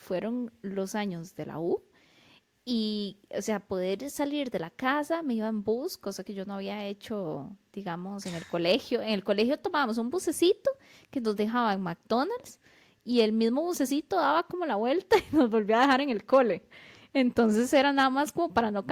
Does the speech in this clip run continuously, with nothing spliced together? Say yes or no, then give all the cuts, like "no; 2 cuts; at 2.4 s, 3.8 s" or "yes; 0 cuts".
yes; 0 cuts